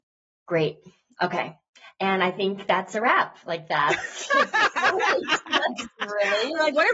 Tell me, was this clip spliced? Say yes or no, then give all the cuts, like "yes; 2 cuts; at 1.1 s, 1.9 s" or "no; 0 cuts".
no; 0 cuts